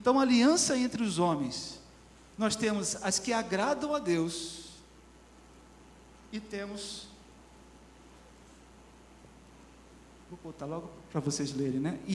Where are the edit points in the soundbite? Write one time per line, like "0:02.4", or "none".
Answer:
none